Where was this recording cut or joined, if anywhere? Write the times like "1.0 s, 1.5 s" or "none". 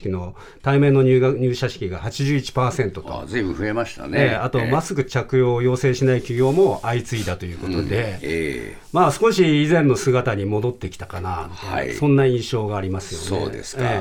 none